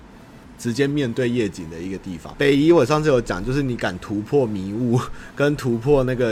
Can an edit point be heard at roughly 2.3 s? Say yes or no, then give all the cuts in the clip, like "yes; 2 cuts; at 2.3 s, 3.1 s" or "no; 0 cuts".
yes; 1 cut; at 2.3 s